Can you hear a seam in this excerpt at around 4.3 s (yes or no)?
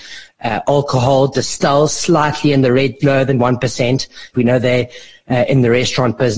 yes